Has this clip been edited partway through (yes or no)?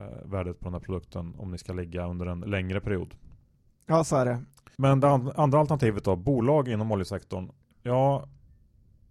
no